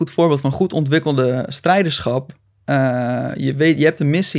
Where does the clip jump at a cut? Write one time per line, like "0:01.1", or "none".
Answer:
none